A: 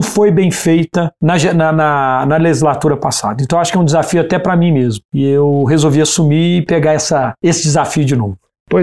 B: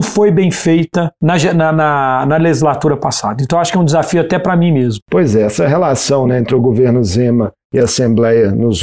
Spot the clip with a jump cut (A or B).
B